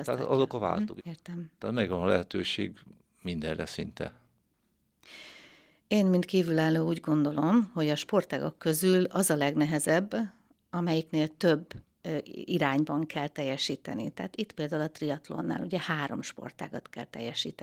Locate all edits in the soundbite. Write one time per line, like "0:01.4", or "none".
0:01.0